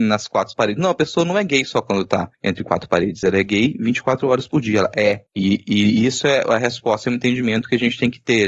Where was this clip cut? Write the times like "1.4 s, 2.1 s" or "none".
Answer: none